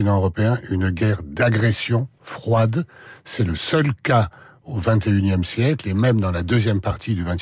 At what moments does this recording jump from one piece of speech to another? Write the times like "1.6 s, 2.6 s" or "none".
none